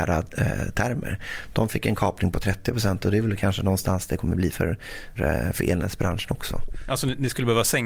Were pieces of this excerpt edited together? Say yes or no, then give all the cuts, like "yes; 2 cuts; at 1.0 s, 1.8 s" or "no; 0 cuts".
yes; 1 cut; at 5.2 s